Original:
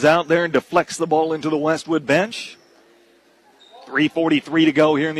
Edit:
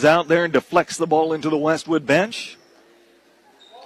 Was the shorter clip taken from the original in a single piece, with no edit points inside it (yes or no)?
yes